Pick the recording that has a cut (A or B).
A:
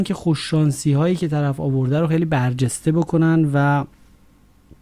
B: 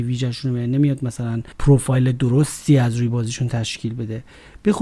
B